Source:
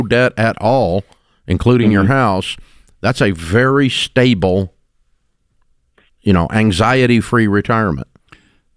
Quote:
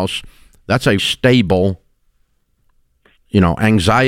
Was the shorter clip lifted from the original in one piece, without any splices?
no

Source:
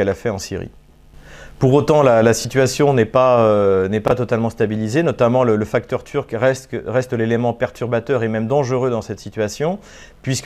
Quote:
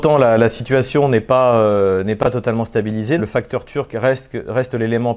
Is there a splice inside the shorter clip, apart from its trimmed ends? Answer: yes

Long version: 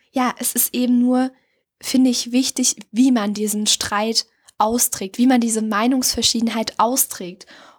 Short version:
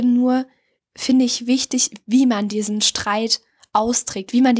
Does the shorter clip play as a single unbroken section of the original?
yes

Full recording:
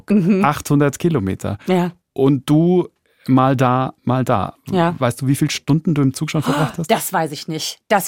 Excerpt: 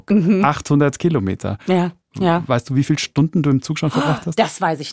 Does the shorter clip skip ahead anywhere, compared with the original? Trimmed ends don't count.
yes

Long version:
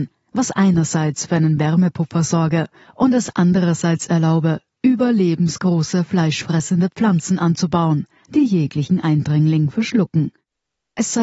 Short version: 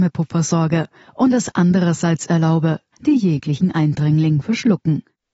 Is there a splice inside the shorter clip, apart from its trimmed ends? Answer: yes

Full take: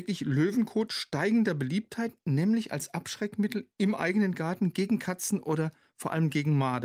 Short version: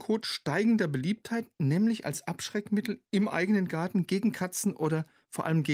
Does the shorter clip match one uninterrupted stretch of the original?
yes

